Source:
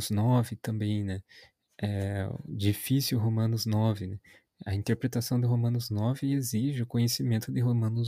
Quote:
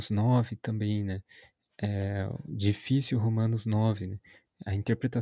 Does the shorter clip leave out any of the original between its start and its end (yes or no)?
no